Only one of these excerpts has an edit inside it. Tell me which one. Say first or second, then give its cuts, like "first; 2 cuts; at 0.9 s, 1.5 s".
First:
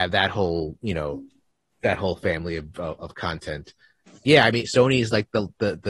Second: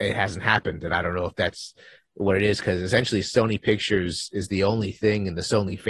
first; 1 cut; at 4.6 s